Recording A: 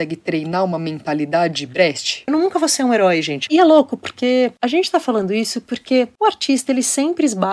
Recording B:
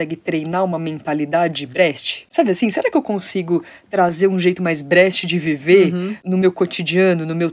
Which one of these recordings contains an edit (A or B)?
A